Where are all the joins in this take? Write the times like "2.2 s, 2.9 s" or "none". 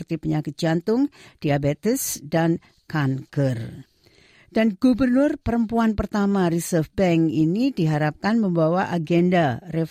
none